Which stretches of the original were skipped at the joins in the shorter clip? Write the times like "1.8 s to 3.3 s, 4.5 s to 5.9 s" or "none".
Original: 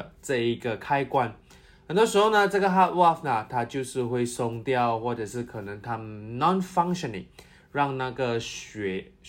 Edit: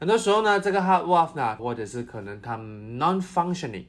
3.5 s to 5.0 s